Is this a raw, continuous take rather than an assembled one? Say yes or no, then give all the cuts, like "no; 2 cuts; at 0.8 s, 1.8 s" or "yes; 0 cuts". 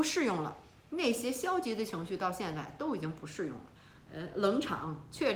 no; 1 cut; at 4.1 s